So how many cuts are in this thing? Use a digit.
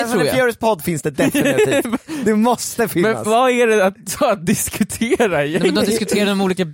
0